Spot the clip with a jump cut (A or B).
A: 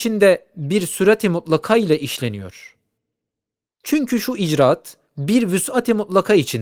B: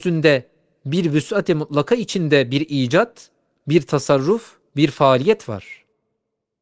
A